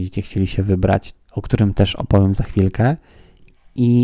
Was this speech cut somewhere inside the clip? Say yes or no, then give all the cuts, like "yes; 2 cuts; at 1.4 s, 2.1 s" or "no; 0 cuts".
yes; 1 cut; at 1.1 s